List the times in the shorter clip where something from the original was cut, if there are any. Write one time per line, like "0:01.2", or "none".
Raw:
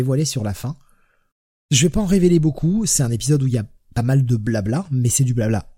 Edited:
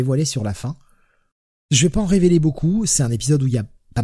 none